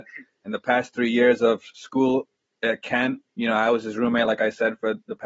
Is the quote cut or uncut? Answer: uncut